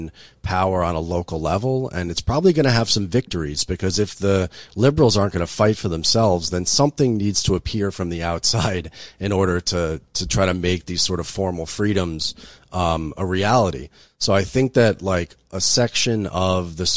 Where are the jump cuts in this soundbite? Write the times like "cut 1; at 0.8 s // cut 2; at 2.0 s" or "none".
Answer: none